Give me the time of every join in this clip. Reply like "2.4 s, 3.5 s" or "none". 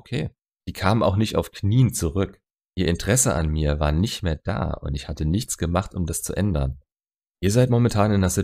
2.7 s